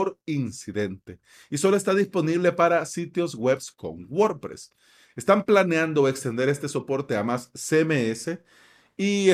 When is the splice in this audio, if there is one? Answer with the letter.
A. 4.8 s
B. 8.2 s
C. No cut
C